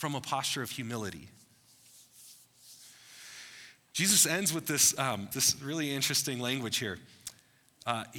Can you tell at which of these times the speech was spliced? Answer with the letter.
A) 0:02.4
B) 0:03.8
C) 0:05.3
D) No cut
C